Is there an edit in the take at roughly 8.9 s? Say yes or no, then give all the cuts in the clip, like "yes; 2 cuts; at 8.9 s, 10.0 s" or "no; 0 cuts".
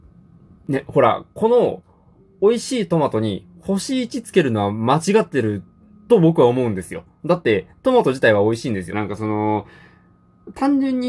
yes; 1 cut; at 8.9 s